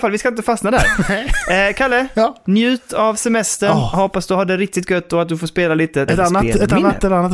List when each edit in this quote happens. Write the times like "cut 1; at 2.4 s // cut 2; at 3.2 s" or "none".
cut 1; at 6.1 s